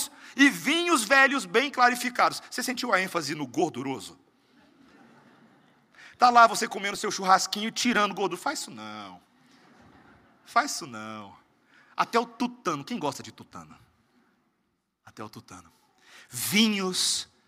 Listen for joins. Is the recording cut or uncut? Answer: uncut